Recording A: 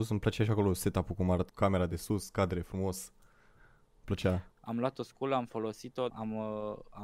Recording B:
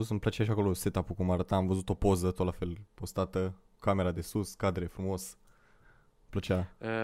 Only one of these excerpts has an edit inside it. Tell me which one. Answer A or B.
A